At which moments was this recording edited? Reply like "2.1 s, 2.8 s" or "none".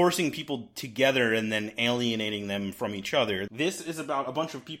3.5 s